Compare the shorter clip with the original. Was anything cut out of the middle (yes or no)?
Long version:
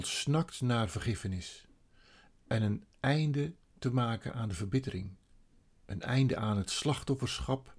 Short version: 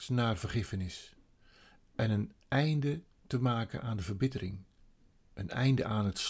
no